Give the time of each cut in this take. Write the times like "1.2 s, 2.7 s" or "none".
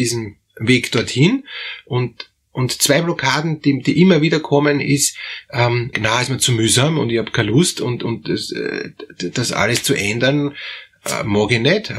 5.9 s